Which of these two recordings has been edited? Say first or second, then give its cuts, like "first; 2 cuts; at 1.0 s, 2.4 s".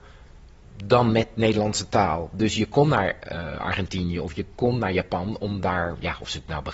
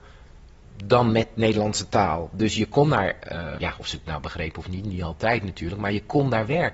second; 1 cut; at 3.6 s